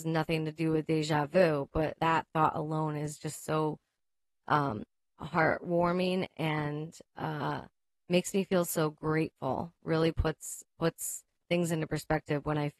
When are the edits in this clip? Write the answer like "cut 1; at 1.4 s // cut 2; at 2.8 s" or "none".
cut 1; at 2.0 s